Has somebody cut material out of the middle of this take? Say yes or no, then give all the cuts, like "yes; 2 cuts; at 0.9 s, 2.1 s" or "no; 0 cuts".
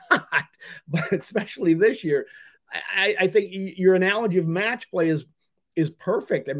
no; 0 cuts